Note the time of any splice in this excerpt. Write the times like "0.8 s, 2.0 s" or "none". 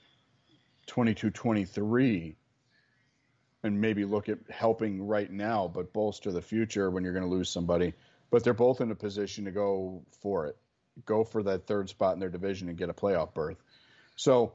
none